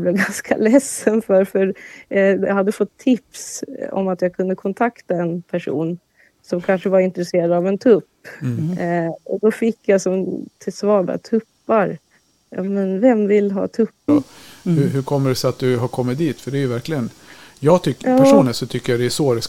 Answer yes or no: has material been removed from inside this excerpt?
yes